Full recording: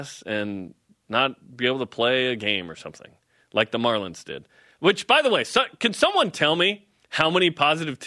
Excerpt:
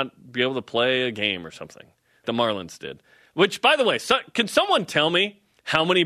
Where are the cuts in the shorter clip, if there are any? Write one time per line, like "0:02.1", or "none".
0:02.2